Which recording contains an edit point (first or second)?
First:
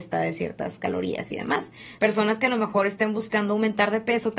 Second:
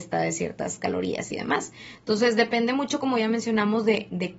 first